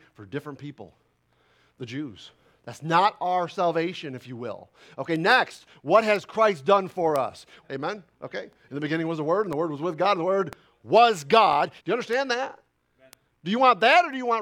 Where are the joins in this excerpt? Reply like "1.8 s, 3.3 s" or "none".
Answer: 7.6 s, 11.8 s